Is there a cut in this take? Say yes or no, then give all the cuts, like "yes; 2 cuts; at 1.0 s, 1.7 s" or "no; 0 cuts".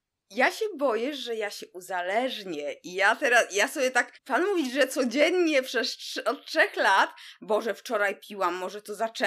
yes; 2 cuts; at 4.1 s, 7.4 s